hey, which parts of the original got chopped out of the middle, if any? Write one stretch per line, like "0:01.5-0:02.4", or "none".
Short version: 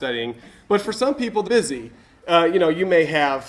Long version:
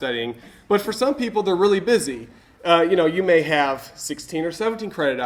0:01.5-0:01.8